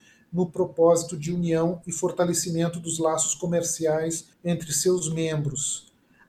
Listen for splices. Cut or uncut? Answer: cut